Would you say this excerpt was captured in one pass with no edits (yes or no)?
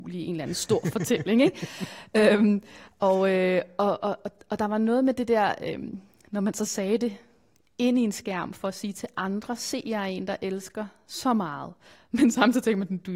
yes